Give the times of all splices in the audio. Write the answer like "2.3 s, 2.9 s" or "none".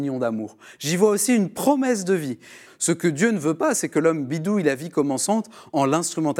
2.7 s